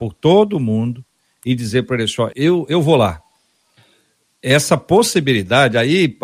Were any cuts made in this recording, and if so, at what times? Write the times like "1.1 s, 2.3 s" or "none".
2.3 s